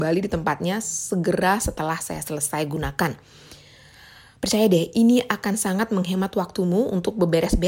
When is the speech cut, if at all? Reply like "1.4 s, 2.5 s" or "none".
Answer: none